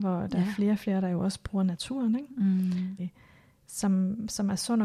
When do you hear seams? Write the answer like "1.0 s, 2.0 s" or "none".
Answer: 3.0 s